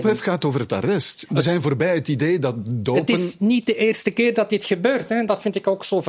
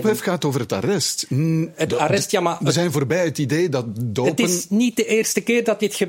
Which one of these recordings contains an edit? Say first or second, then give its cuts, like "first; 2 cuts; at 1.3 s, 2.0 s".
first; 1 cut; at 1.3 s